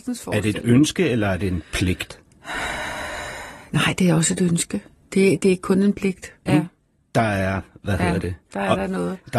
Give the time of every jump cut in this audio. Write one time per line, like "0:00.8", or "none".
0:06.5